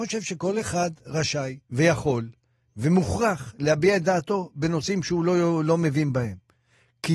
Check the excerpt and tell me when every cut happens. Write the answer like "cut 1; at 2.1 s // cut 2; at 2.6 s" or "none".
cut 1; at 1.6 s